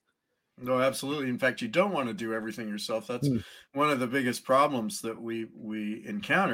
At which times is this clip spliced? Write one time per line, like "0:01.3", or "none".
none

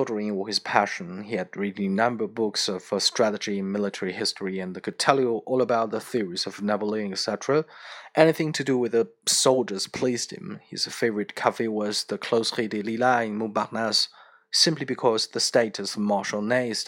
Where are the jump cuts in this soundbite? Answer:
none

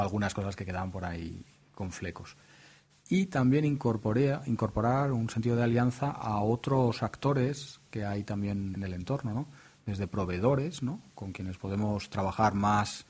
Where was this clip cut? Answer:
0:02.9
0:08.7

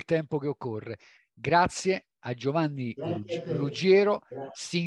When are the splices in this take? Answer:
none

